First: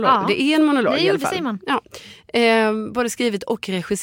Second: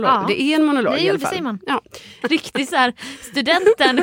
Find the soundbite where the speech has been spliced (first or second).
second